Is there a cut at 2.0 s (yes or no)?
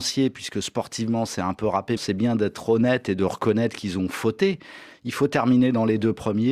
yes